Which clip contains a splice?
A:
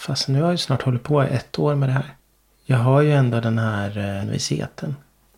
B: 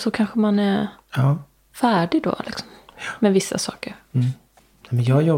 A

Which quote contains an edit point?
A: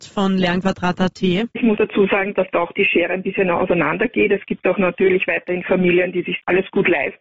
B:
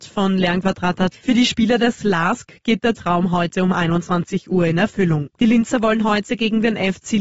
B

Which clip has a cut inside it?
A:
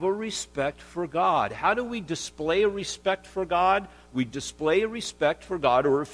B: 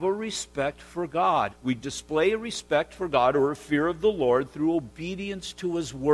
B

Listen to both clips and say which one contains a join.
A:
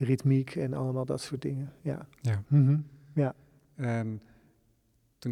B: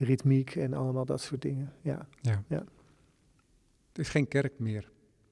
A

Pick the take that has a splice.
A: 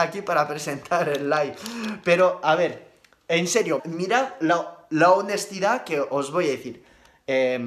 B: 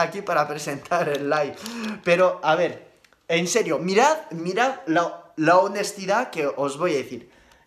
A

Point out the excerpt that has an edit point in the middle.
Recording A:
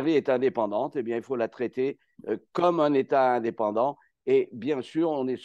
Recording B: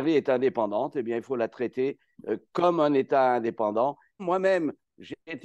B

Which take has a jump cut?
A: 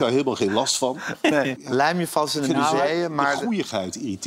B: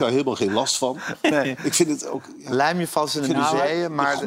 A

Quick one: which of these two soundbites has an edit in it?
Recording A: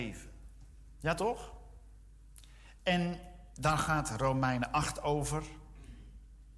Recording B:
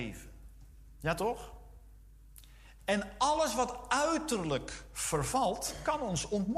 B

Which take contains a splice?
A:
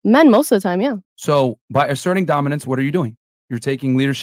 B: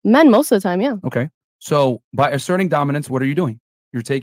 A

